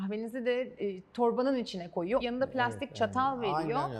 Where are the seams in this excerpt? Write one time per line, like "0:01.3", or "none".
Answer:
0:02.2